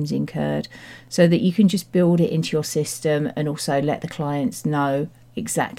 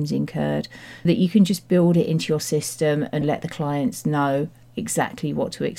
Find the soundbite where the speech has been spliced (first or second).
second